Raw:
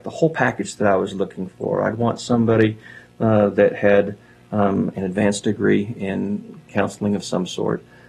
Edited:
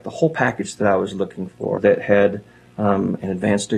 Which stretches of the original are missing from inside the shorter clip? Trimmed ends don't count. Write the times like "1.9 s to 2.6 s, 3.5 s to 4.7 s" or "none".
1.8 s to 3.5 s